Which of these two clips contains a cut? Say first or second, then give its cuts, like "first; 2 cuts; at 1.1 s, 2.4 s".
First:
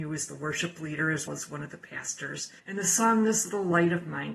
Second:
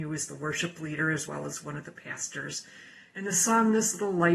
first; 2 cuts; at 1.3 s, 2.6 s